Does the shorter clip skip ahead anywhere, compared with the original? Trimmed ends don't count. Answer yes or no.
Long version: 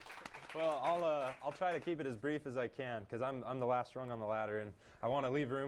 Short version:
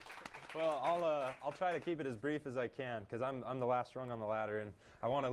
no